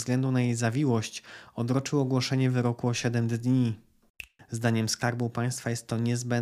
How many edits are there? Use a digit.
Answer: 1